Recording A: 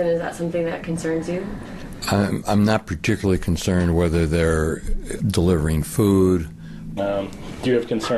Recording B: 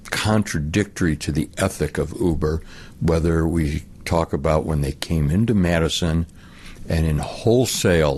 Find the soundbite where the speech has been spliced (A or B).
A